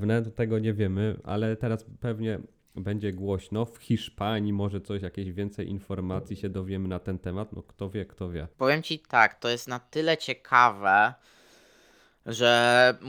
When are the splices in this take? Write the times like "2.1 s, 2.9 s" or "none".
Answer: none